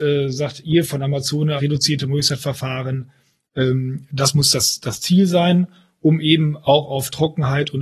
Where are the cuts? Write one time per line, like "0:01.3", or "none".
0:01.6

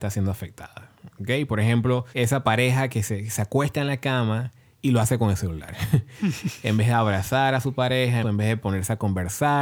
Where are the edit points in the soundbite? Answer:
0:02.1
0:08.2

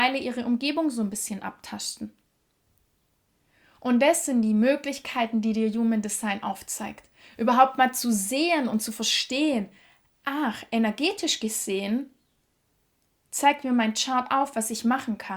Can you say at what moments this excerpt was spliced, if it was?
none

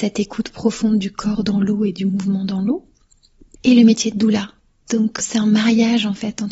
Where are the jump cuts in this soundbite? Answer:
0:03.6
0:05.2

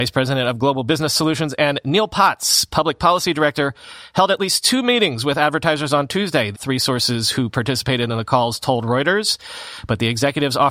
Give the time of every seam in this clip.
0:06.5

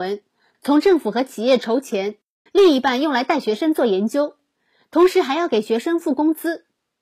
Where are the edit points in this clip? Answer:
0:02.5

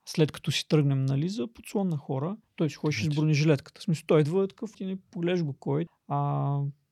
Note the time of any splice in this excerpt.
0:02.4
0:04.7
0:05.9

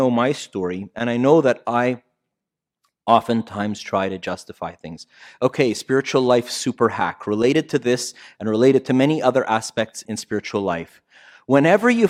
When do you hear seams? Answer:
0:10.1

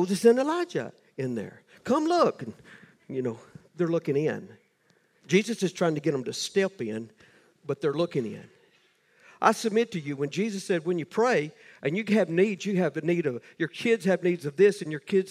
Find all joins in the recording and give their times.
none

